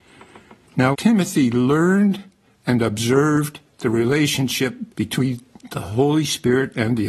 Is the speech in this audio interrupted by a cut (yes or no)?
yes